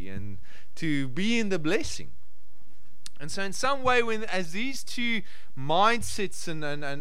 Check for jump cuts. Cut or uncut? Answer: uncut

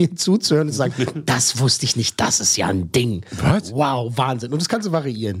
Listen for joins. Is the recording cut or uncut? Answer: uncut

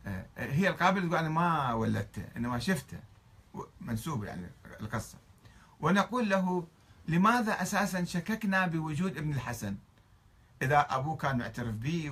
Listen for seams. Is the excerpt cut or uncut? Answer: uncut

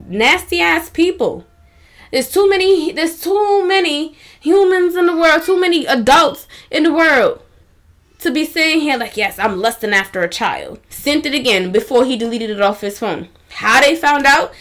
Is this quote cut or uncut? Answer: cut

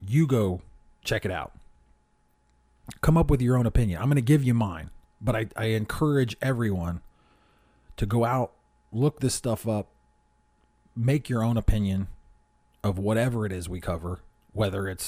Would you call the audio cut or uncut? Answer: uncut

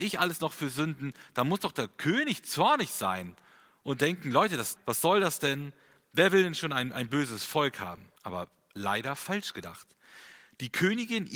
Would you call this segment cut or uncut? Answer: cut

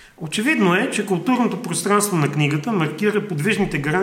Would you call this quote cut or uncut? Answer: uncut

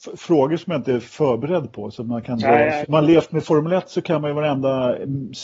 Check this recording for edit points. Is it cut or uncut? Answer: cut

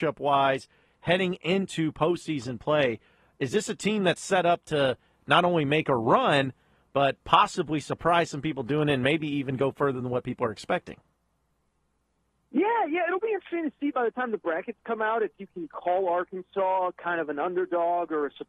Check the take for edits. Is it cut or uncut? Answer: uncut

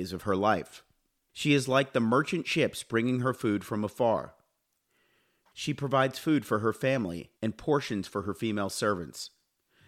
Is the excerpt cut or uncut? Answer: cut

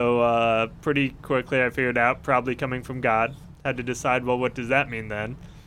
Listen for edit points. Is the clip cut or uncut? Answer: uncut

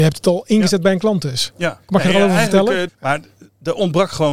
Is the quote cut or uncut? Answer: cut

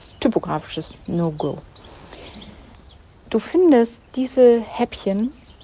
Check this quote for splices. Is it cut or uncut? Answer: uncut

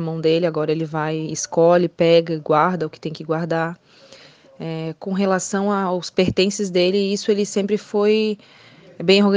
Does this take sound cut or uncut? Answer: uncut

